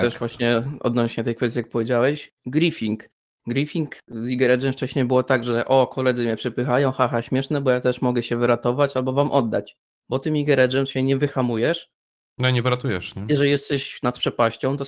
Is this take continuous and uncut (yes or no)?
no